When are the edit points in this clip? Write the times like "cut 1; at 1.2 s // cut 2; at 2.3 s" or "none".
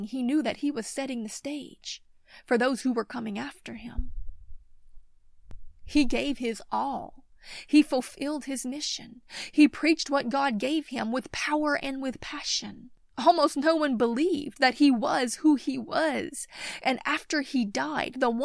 none